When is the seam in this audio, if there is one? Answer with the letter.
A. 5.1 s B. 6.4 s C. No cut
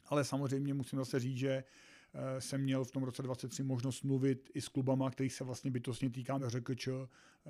B